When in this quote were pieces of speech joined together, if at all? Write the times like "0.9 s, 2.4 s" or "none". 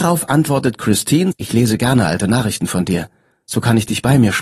1.3 s